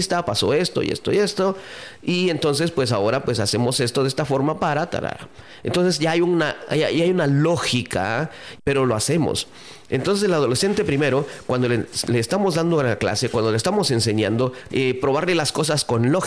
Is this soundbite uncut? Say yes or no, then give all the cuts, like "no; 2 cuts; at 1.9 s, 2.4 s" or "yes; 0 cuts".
no; 2 cuts; at 8.6 s, 14.7 s